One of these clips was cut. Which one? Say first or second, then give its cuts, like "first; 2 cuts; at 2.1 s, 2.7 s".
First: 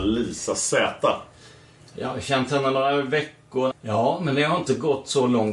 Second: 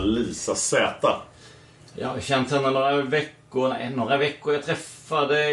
first; 1 cut; at 3.7 s